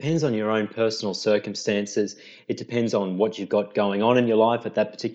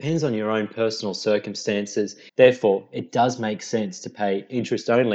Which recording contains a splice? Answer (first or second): second